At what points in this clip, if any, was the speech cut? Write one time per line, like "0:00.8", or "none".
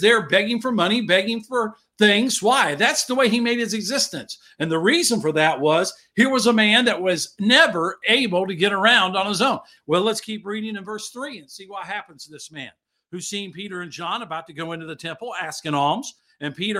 0:09.8